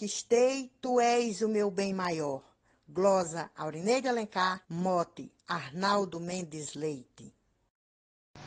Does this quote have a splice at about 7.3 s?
no; 2 cuts; at 2.7 s, 4.6 s

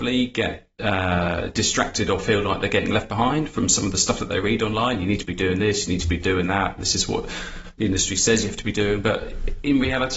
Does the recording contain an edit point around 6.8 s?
no; 0 cuts

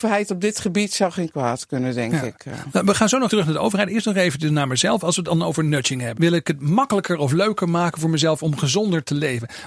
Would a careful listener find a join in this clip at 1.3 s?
no; 2 cuts; at 3.3 s, 6.2 s

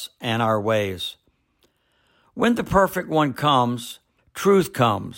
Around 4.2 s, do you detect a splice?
yes; 1 cut; at 4.2 s

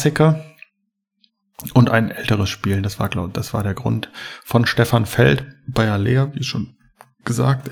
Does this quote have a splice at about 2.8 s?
no; 0 cuts

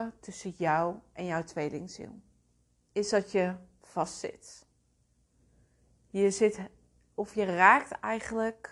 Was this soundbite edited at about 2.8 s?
yes; 1 cut; at 2.8 s

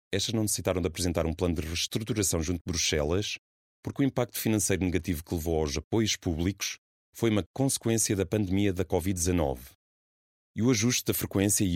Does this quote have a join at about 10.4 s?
yes; 1 cut; at 10.4 s

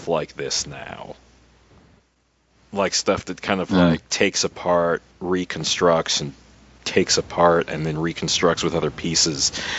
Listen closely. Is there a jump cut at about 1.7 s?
no; 0 cuts

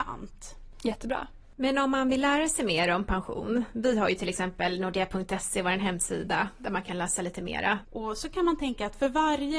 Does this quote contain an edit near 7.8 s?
yes; 1 cut; at 7.8 s

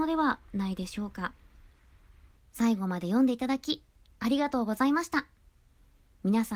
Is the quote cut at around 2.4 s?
yes; 1 cut; at 2.4 s

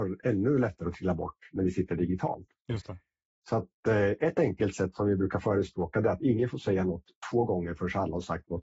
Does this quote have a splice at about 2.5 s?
no; 0 cuts

